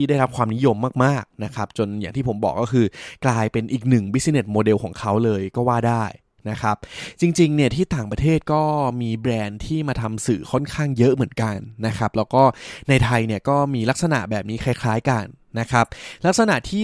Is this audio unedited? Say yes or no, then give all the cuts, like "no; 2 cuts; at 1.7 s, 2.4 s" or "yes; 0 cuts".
yes; 0 cuts